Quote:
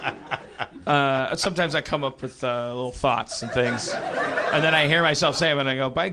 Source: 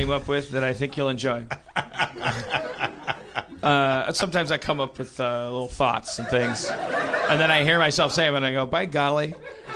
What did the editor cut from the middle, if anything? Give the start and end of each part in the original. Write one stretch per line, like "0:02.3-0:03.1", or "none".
none

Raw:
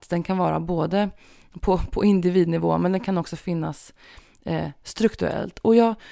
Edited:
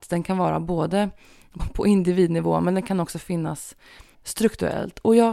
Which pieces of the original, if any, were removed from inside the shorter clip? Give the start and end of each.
0:01.6-0:01.8
0:04.3-0:04.7

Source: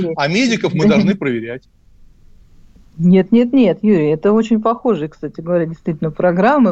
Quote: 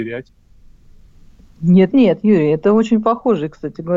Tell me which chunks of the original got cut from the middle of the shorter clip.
0:03.3-0:03.5

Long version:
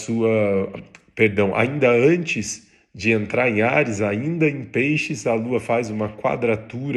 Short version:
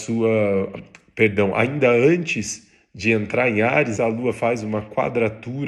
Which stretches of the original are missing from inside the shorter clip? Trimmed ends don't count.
0:04.0-0:05.2

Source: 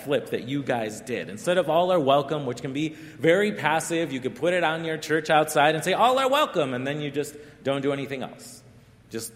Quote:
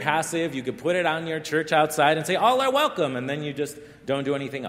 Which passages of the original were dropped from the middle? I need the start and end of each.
none

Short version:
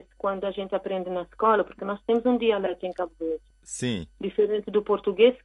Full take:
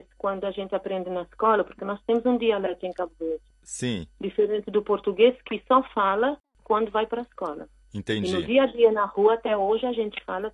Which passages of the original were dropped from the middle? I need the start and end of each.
none

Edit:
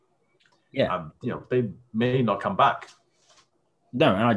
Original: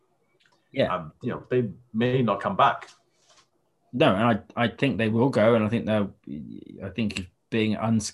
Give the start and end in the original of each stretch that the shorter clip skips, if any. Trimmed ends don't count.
none

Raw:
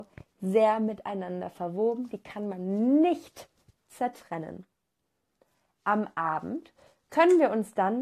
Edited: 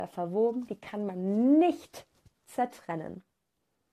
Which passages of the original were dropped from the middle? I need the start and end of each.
none

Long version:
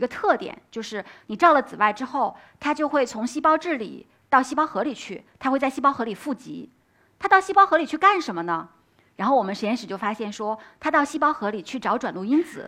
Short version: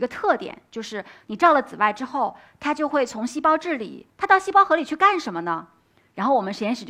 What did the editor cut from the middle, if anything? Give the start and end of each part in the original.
0:04.1-0:07.1

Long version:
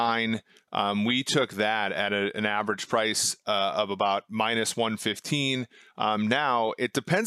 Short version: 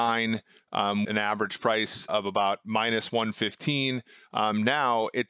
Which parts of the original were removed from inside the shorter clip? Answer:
0:01.0-0:02.3
0:03.4-0:03.7

